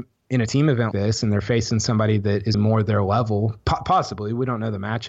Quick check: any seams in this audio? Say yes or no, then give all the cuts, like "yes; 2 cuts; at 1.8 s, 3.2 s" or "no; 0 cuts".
yes; 2 cuts; at 0.9 s, 2.5 s